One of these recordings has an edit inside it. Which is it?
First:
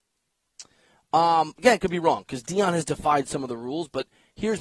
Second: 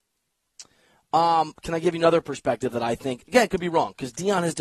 first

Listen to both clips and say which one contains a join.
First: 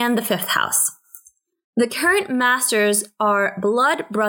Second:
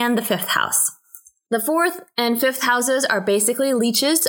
second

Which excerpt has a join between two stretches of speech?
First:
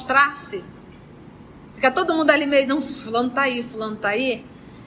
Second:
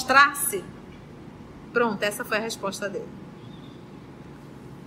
second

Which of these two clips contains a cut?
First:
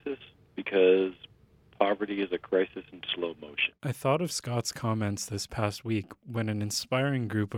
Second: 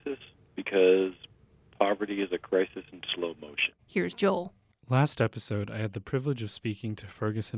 second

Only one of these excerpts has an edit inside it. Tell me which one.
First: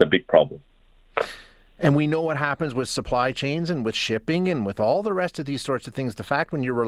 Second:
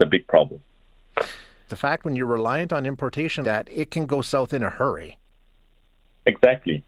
second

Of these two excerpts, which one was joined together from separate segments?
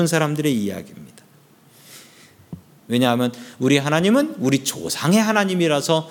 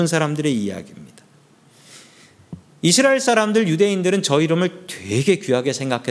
first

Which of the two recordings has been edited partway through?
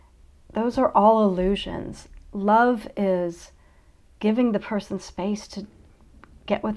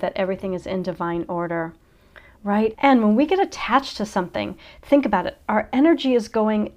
second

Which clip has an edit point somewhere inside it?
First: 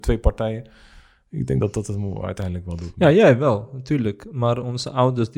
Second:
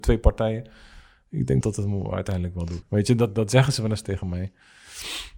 second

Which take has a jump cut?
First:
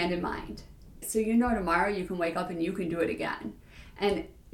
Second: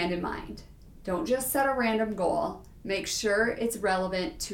first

